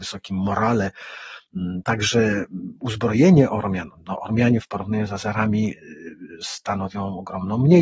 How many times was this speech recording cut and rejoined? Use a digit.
0